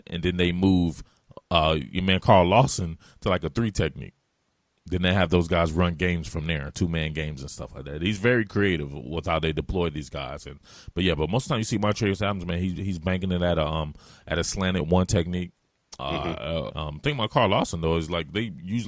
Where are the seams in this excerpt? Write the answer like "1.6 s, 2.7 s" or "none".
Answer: 16.7 s

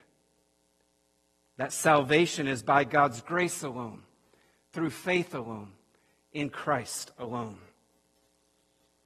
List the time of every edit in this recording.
none

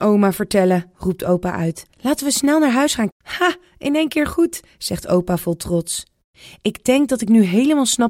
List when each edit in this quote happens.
3.1 s

